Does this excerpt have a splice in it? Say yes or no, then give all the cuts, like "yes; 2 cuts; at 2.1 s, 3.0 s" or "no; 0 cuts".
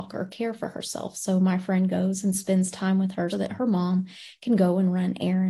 yes; 1 cut; at 3.3 s